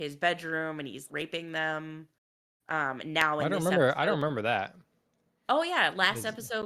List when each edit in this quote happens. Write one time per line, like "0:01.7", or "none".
0:01.1